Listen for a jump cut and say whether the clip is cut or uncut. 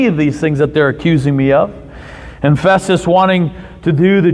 uncut